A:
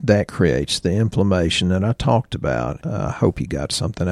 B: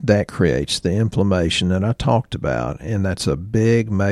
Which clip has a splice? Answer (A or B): A